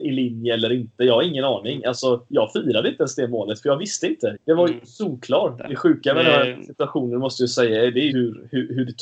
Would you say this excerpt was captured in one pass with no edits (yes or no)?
no